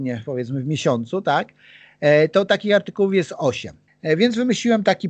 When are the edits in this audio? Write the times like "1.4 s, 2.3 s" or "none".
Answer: 3.9 s